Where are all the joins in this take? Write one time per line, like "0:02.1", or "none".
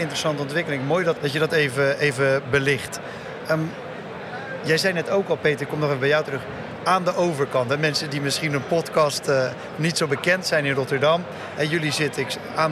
0:01.2